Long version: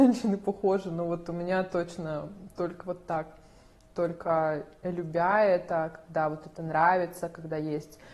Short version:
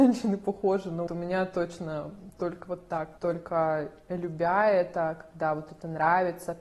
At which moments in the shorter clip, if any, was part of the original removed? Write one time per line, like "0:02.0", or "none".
0:01.1
0:03.2